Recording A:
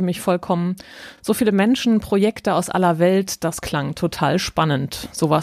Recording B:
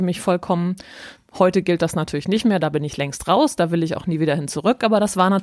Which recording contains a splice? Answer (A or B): B